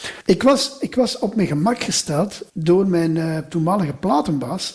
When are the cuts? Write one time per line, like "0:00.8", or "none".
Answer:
0:02.5

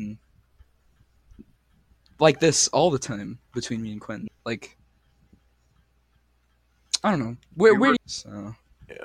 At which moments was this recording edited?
0:04.3
0:08.0

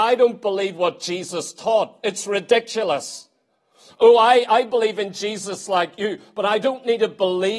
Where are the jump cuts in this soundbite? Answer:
none

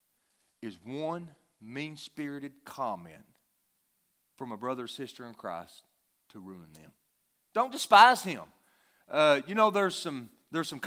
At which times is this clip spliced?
0:07.3

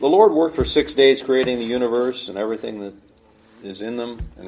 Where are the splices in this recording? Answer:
none

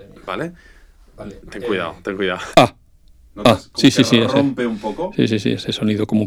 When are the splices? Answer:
0:02.5

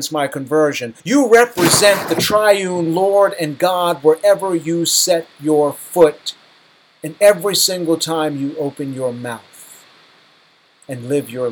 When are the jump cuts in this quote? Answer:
0:01.0

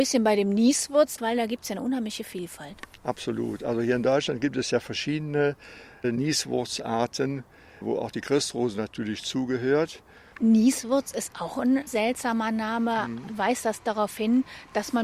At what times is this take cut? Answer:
0:10.3

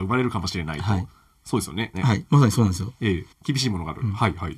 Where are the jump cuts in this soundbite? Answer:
0:01.9
0:03.3

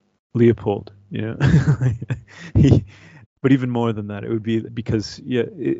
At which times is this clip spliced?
0:03.2
0:04.6

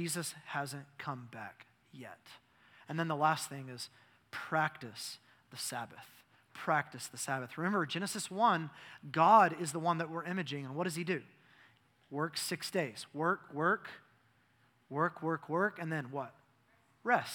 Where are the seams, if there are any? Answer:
0:13.5

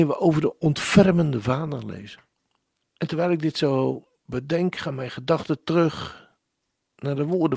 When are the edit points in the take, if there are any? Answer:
0:03.0

